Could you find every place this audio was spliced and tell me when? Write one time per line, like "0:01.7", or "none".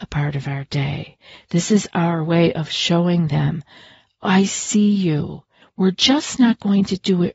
0:05.6